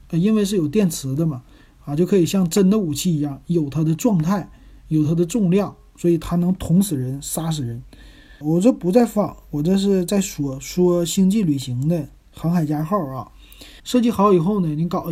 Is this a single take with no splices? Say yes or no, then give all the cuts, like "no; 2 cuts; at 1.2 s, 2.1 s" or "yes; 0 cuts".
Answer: no; 2 cuts; at 8.4 s, 13.8 s